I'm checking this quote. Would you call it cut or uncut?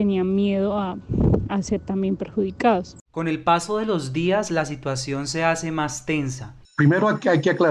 cut